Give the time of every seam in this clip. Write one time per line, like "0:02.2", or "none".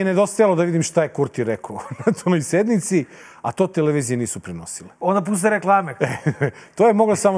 none

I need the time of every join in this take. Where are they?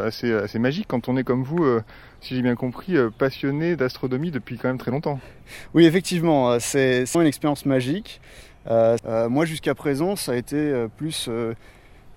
0:07.1
0:09.0

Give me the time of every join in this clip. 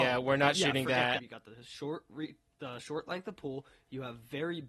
0:01.2

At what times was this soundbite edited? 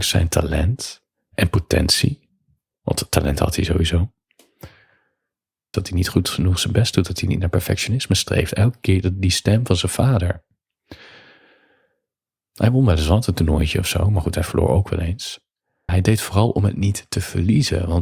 0:05.7
0:12.4
0:15.9

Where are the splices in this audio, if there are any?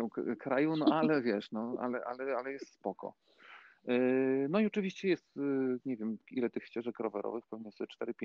none

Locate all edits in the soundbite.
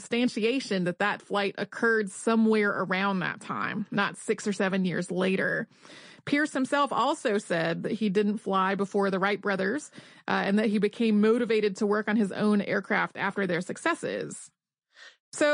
none

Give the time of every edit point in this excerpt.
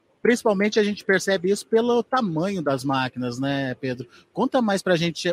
none

